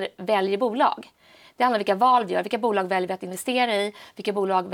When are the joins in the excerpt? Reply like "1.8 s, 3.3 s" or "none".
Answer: none